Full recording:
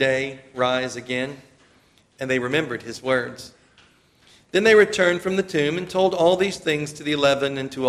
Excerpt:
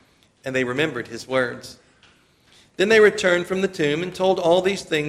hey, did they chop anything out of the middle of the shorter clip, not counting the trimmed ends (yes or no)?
no